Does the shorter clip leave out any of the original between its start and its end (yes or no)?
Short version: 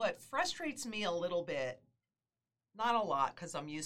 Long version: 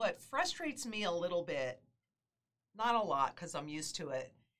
no